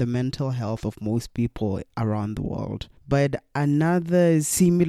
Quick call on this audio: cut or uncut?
cut